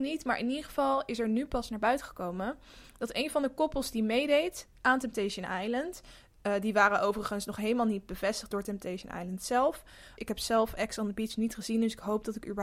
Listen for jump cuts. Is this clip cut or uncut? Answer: cut